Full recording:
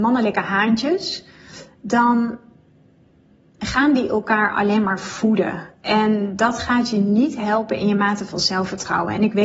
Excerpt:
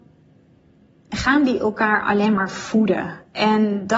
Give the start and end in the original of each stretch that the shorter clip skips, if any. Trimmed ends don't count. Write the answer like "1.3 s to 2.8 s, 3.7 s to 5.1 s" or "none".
none